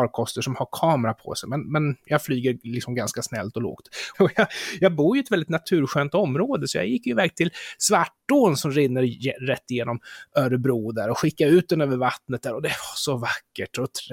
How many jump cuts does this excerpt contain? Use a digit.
1